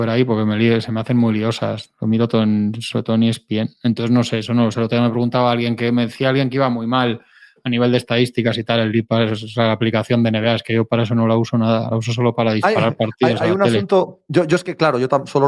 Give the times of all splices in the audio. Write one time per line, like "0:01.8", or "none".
none